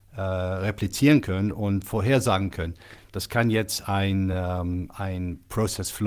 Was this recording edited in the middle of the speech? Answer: no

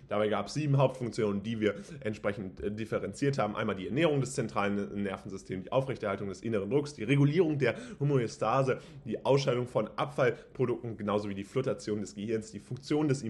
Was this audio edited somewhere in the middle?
no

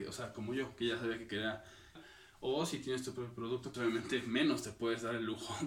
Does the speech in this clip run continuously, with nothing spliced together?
no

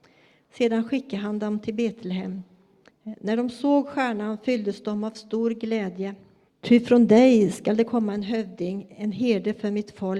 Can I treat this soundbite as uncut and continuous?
no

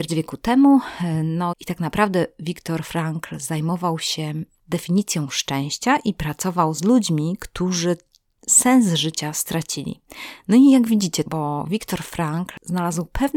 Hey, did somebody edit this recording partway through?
yes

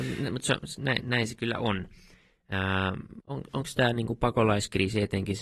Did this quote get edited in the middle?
yes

